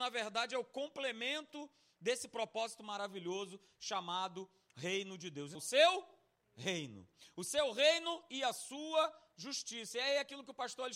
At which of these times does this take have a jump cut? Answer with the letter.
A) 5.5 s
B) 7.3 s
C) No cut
A